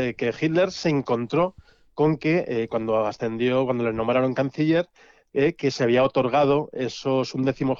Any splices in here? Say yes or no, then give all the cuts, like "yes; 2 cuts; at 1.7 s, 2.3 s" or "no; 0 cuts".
no; 0 cuts